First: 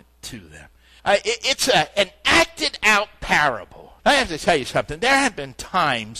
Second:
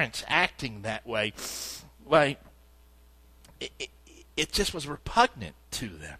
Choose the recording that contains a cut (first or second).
first